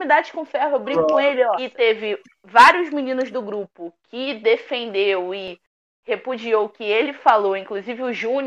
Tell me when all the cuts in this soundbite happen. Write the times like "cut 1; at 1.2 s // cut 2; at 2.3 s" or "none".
cut 1; at 1.6 s